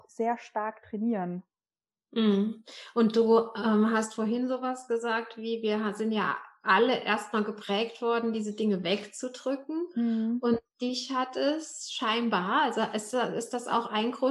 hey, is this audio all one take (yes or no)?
yes